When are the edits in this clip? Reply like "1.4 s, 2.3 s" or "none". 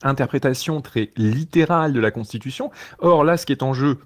none